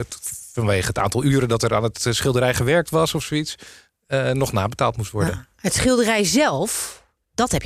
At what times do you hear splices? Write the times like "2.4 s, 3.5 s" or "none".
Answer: none